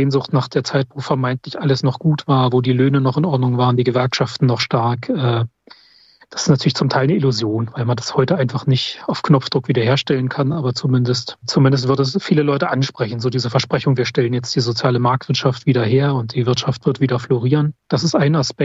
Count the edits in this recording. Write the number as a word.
zero